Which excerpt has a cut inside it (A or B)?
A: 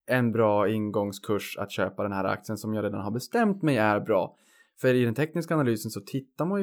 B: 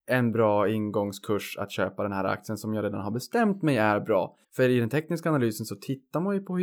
B